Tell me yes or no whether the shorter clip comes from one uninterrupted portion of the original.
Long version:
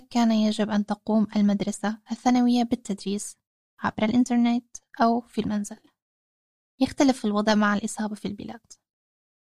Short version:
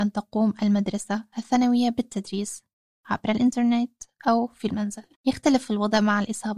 no